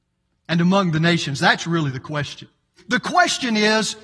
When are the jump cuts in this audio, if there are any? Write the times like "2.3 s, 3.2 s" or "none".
2.8 s